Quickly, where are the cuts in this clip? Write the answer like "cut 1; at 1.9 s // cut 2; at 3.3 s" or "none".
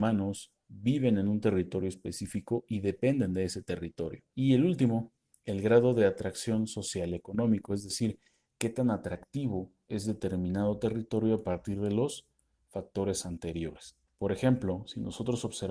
cut 1; at 4.3 s // cut 2; at 14.1 s